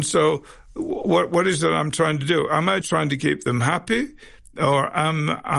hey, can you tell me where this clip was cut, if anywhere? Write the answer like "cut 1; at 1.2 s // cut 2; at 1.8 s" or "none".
cut 1; at 2.8 s